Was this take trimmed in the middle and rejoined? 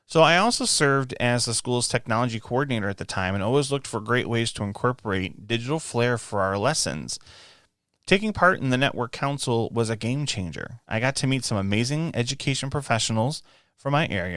no; 0 cuts

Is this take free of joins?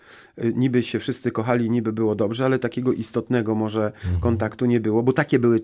yes; 0 cuts

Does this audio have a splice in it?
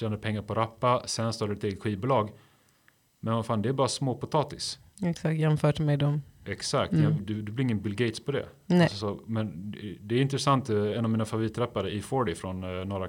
yes; 1 cut; at 7.2 s

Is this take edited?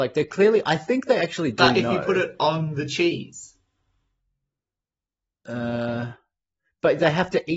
no; 0 cuts

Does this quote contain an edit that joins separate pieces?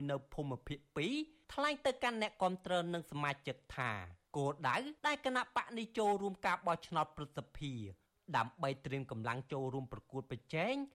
yes; 1 cut; at 5.0 s

